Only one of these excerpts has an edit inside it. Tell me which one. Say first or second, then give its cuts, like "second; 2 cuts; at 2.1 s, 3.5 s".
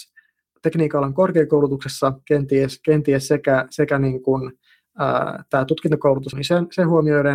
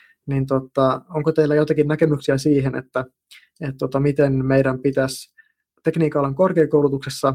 first; 1 cut; at 6.3 s